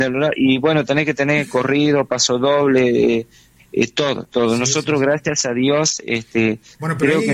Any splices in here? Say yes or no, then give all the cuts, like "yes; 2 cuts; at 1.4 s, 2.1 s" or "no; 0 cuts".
no; 0 cuts